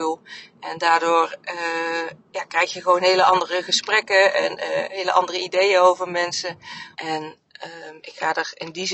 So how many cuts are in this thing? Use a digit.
2